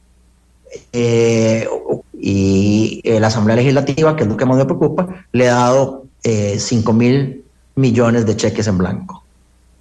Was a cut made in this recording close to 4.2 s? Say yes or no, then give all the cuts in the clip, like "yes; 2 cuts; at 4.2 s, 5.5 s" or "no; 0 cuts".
no; 2 cuts; at 2.0 s, 6.1 s